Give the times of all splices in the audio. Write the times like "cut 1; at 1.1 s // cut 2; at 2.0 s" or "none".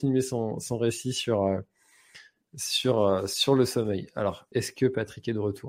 cut 1; at 4.5 s